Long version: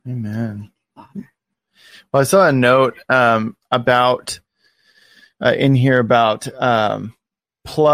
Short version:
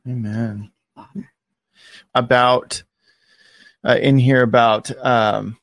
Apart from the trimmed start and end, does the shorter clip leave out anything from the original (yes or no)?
yes